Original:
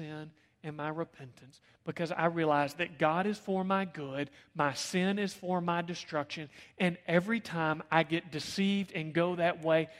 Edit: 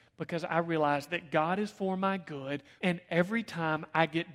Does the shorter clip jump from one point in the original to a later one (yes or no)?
yes